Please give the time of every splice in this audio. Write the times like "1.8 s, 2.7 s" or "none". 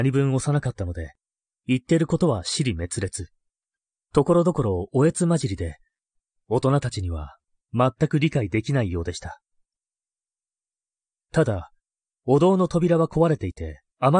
none